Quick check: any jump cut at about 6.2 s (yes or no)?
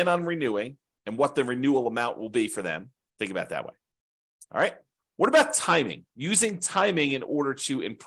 no